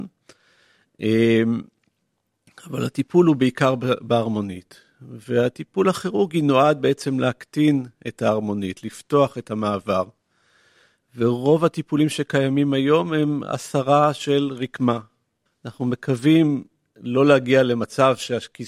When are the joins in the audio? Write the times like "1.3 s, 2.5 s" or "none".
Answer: 15.5 s